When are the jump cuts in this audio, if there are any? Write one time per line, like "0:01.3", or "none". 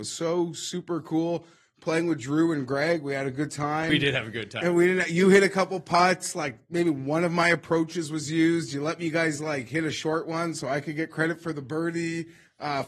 none